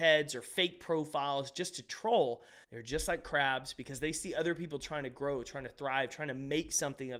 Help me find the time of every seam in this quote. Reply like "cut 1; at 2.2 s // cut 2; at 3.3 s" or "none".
cut 1; at 2.6 s